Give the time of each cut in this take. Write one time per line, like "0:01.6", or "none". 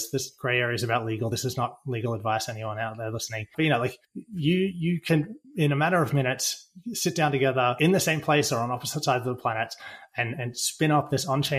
none